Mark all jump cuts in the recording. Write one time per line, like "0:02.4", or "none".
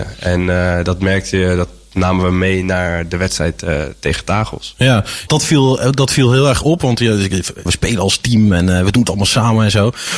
0:05.3
0:07.7